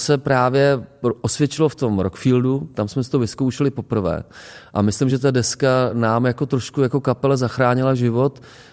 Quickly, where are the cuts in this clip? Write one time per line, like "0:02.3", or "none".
none